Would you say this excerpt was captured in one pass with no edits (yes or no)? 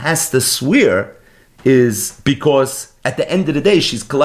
yes